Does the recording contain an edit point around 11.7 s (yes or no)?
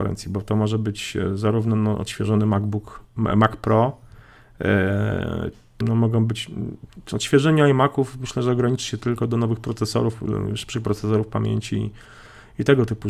no